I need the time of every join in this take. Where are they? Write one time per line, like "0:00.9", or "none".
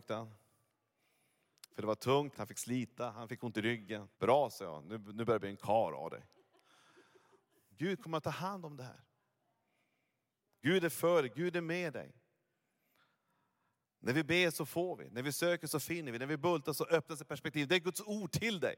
0:02.3
0:04.1
0:07.7